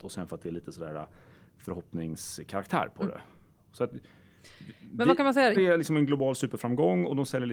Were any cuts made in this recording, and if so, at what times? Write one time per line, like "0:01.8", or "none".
0:05.5